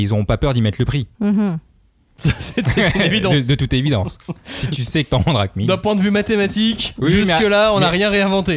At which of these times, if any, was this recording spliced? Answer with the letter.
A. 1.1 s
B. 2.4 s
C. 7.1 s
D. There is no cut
A